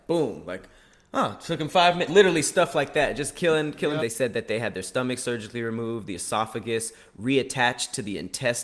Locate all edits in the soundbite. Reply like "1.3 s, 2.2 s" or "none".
2.1 s, 4.0 s